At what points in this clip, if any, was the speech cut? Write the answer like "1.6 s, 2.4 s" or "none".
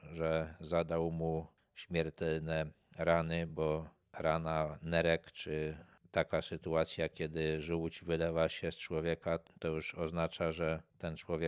none